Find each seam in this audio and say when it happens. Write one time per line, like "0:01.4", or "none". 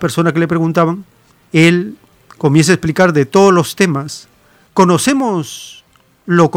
0:04.7